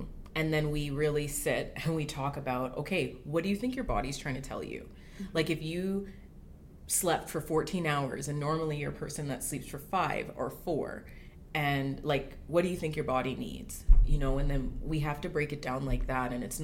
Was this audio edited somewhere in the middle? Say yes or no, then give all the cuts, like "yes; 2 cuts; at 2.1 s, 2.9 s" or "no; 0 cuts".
no; 0 cuts